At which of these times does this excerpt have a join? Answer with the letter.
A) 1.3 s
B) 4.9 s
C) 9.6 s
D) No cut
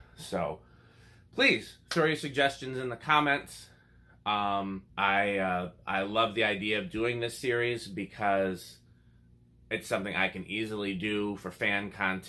B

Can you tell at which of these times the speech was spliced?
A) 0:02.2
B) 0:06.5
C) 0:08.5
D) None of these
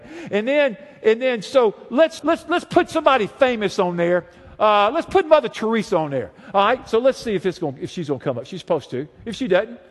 A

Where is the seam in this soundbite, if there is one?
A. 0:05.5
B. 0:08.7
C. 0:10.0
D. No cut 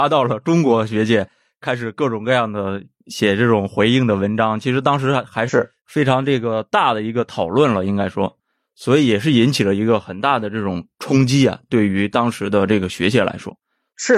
A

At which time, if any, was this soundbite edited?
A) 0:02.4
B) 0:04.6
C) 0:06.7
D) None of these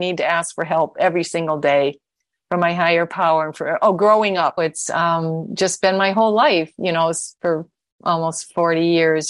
B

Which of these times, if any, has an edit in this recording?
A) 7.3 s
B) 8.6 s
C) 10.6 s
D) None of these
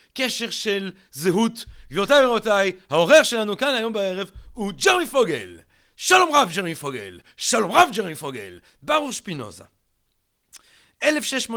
B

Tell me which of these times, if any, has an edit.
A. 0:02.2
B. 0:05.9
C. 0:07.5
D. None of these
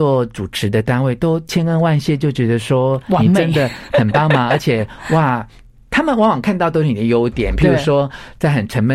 D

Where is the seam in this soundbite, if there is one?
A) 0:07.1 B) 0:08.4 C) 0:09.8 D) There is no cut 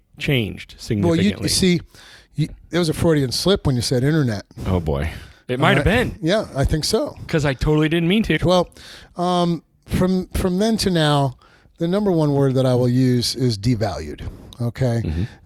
B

